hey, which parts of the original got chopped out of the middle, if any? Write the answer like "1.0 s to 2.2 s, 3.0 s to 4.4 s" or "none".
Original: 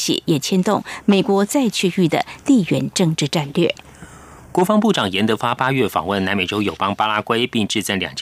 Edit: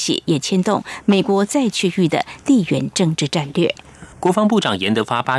4.1 s to 4.4 s